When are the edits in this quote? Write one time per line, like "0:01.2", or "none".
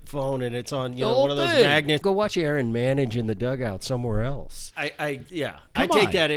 0:02.0
0:04.7